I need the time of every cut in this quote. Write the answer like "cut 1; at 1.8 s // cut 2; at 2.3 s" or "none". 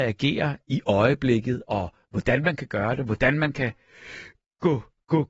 none